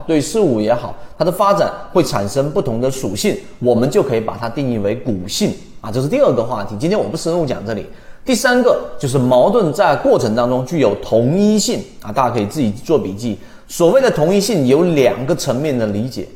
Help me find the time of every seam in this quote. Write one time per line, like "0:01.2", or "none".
none